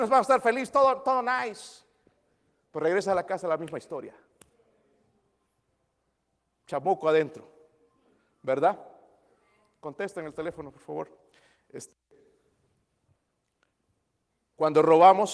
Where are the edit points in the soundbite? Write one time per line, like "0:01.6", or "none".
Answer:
none